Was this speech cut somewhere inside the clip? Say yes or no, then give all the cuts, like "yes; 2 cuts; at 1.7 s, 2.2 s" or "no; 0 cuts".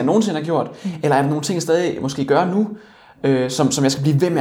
no; 0 cuts